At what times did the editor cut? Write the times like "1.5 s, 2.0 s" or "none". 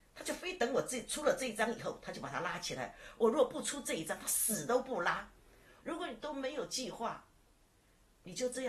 5.8 s